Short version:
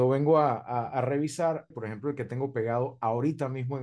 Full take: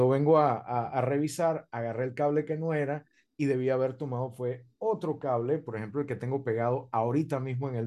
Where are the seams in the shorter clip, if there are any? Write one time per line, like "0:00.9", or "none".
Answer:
0:01.7